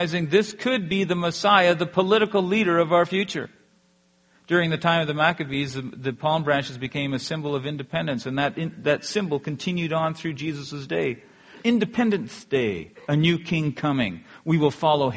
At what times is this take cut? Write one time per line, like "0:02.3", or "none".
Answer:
0:11.6
0:13.1